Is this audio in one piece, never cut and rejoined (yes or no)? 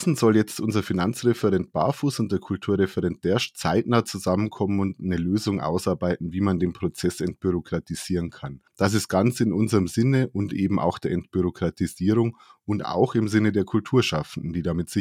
yes